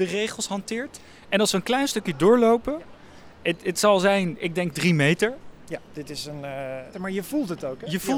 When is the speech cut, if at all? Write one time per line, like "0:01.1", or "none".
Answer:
0:06.9